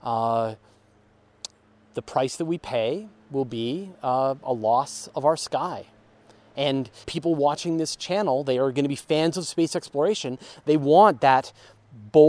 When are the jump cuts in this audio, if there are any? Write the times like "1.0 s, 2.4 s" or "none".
7.0 s